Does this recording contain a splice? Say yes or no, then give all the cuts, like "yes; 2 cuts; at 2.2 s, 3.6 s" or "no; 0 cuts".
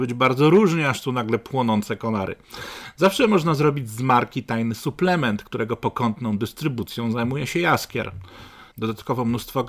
yes; 1 cut; at 8.7 s